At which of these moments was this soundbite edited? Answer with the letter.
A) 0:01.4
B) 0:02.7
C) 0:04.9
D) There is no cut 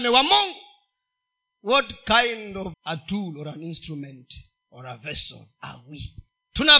B